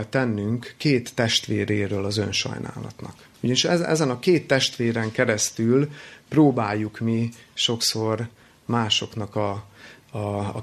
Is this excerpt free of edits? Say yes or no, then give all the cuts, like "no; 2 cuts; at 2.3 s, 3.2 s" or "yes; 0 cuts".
no; 1 cut; at 3.3 s